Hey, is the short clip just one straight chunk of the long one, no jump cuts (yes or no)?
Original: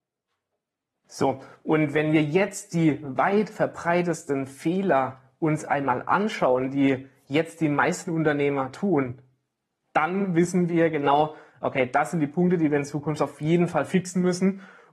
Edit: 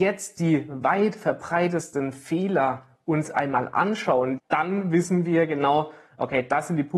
no